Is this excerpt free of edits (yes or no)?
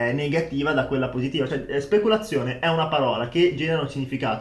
yes